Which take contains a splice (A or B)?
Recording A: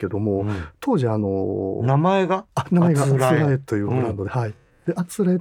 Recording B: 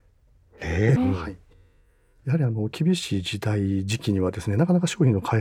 B